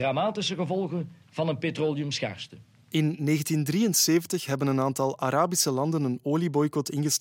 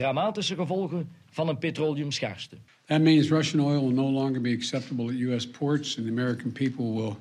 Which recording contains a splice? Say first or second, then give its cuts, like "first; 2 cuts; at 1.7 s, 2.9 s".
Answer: second; 1 cut; at 2.7 s